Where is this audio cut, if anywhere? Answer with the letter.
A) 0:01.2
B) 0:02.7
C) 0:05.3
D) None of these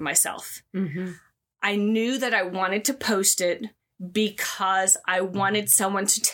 D